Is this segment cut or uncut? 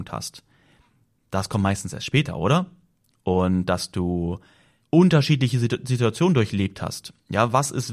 uncut